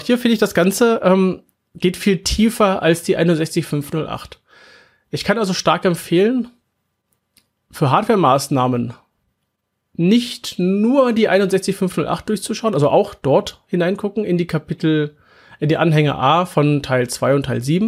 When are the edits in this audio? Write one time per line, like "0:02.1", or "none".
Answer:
none